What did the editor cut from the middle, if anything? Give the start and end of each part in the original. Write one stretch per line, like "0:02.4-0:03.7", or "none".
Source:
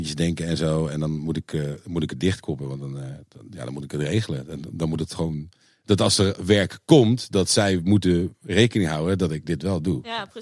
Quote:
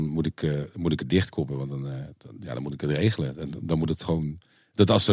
none